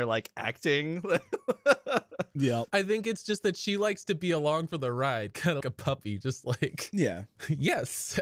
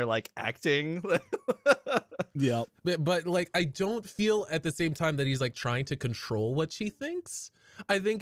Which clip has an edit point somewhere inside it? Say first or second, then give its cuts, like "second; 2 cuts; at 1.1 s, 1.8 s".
first; 2 cuts; at 2.7 s, 5.6 s